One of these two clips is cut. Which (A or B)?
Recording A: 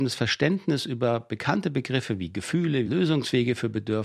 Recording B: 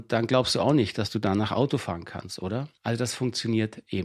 A